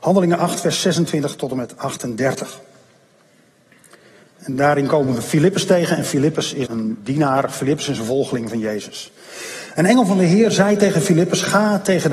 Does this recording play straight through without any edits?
no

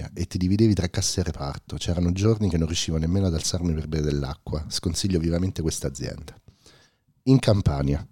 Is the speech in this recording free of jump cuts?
yes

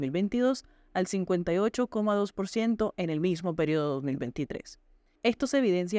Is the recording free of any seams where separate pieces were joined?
yes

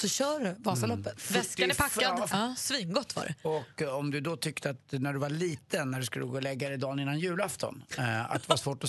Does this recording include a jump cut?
yes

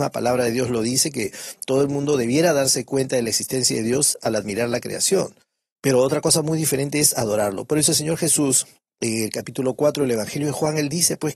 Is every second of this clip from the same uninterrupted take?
yes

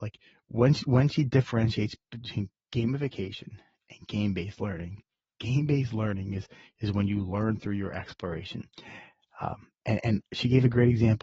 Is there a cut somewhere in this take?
no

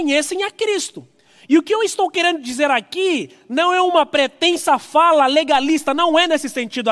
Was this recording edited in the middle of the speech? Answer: no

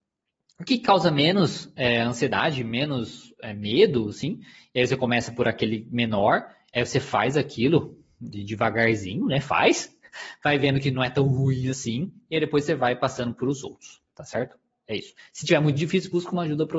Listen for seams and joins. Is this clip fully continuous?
yes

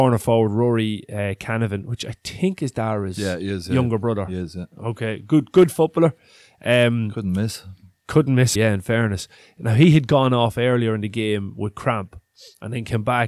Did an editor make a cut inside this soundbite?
yes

